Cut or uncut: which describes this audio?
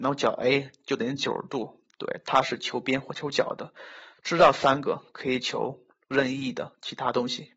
cut